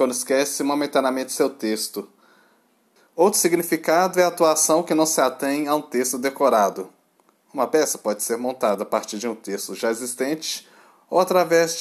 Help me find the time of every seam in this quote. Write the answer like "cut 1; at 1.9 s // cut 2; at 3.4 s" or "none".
cut 1; at 3.0 s